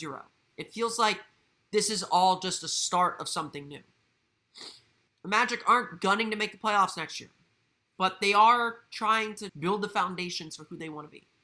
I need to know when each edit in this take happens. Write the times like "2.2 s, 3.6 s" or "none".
5.1 s, 7.8 s, 9.5 s